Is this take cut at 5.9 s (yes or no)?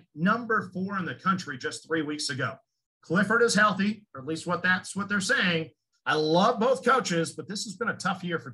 yes